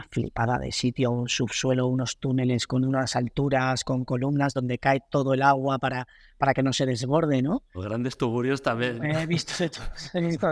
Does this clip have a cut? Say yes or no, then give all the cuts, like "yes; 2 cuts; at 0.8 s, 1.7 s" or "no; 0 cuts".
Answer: yes; 1 cut; at 7.7 s